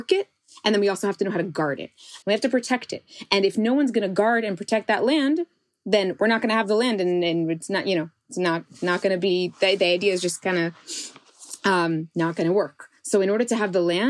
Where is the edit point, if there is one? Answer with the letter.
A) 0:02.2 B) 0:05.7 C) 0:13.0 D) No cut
A